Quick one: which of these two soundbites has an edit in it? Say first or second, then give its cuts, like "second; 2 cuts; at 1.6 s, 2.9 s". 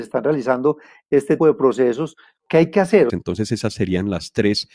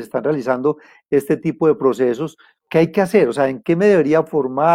first; 2 cuts; at 1.4 s, 3.1 s